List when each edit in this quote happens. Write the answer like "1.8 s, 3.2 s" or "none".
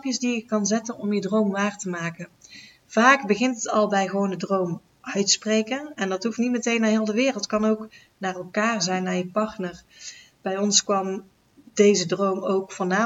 none